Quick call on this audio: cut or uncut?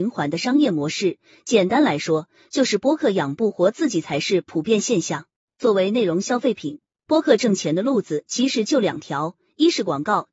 uncut